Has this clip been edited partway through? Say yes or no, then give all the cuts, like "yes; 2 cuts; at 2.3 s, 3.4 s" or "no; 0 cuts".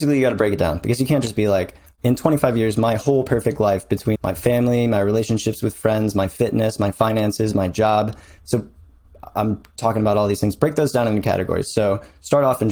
yes; 1 cut; at 4.1 s